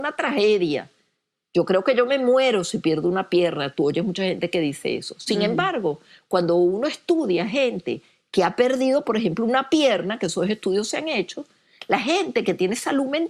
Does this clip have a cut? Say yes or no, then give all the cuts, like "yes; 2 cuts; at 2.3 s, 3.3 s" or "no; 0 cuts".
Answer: no; 0 cuts